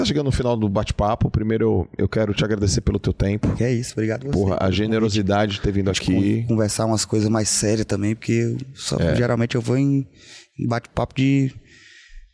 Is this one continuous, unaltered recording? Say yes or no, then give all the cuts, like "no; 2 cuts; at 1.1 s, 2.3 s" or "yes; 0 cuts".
yes; 0 cuts